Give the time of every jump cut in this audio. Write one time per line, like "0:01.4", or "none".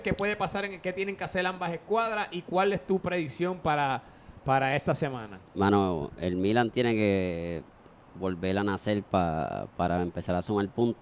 none